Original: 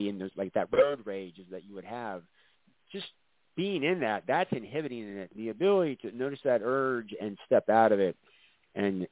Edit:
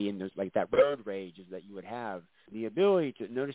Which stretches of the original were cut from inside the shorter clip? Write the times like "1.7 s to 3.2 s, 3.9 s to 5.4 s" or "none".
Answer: 2.5 s to 5.3 s